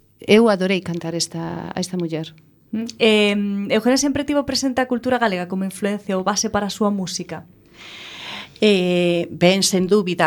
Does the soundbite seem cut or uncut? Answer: uncut